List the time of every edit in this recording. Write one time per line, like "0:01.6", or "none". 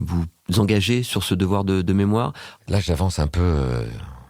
0:02.6